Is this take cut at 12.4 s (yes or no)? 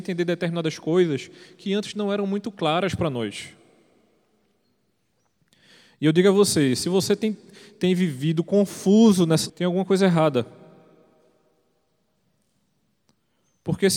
no